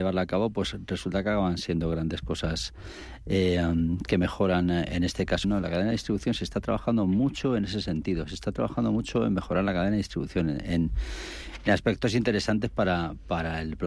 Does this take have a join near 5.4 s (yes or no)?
yes